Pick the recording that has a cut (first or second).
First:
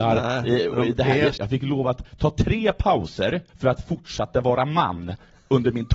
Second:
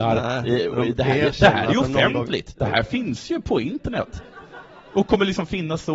first